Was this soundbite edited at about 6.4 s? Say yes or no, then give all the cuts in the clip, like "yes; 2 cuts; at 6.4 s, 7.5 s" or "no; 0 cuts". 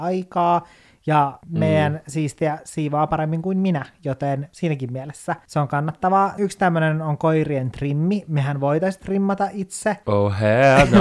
yes; 1 cut; at 6.4 s